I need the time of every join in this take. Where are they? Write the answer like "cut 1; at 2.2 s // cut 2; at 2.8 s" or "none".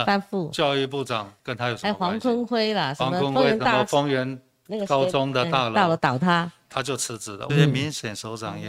cut 1; at 7.5 s